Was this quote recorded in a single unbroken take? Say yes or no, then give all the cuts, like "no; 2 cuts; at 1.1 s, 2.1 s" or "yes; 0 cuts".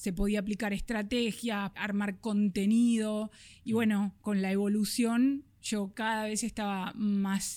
no; 1 cut; at 1.7 s